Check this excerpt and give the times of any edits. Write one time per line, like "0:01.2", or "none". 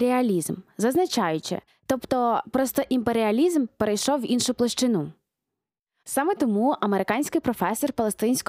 0:01.7
0:06.0